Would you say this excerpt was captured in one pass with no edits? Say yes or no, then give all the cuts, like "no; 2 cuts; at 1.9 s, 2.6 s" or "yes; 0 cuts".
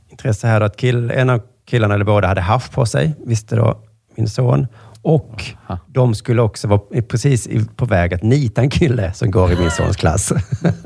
yes; 0 cuts